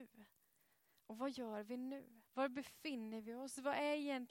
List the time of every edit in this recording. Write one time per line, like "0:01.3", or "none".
0:02.3